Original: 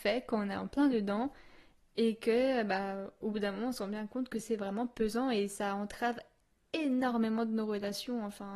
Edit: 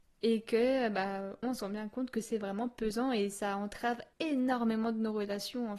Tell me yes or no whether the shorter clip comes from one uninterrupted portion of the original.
no